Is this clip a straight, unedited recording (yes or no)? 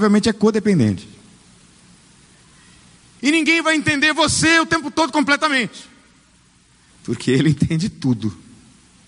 no